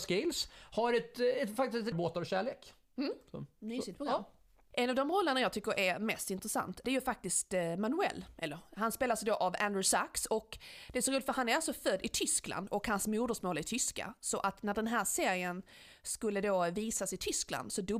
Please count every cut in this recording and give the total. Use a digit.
1